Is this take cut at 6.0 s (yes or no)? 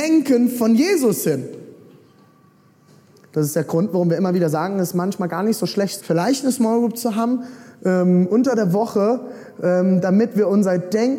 yes